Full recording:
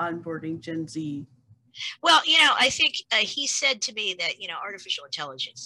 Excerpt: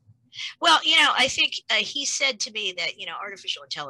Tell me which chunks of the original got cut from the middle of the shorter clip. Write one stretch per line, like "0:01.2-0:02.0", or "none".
none